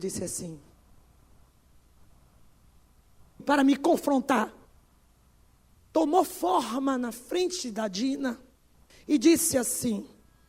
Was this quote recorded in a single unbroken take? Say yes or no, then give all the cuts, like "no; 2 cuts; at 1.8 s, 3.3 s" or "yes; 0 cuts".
no; 2 cuts; at 3.4 s, 5.7 s